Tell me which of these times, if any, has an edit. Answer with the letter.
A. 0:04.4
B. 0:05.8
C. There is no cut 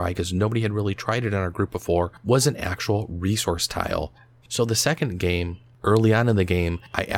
A